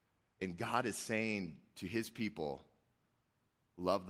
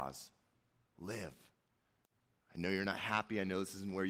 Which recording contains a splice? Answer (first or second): second